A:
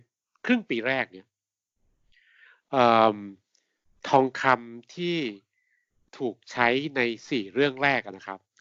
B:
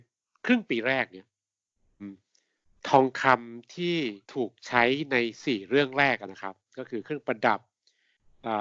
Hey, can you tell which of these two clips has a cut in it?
B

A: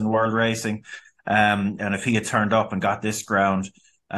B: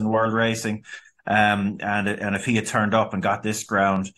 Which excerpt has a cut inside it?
A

